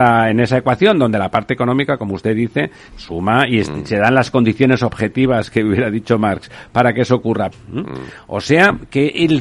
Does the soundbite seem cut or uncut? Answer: cut